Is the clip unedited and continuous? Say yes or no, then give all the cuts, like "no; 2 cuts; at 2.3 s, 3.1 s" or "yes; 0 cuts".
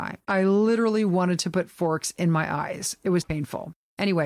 no; 1 cut; at 3.2 s